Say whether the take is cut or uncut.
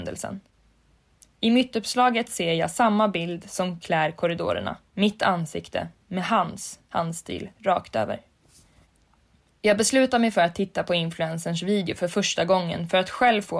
uncut